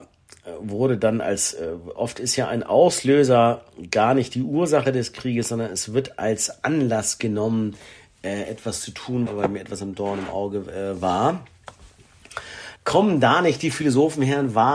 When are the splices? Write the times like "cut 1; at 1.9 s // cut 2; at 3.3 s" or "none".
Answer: cut 1; at 9.3 s // cut 2; at 12.8 s